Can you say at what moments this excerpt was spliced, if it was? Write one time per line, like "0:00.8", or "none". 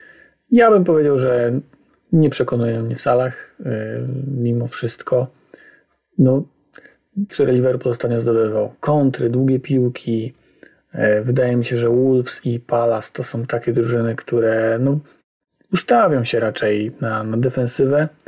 0:07.3